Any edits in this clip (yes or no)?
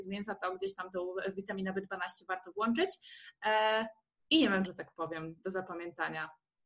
yes